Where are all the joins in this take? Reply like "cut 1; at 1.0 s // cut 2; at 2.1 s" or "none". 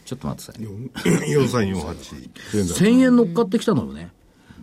cut 1; at 2.2 s